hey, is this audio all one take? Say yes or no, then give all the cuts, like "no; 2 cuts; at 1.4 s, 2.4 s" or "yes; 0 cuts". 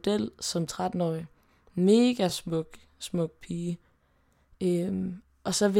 yes; 0 cuts